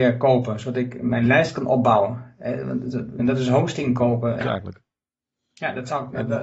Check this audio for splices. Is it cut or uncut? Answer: cut